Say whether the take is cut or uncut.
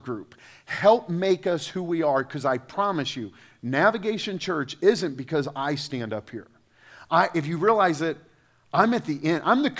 uncut